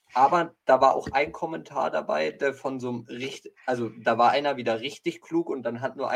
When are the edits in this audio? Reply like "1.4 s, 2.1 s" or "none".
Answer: none